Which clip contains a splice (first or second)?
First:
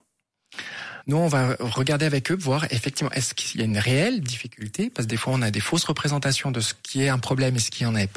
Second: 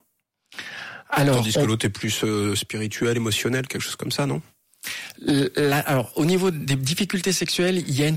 first